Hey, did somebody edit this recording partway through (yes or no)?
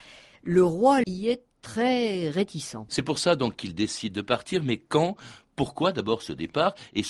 yes